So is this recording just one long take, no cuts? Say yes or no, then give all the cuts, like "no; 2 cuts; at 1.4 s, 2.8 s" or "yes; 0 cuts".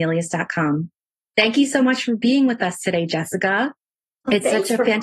yes; 0 cuts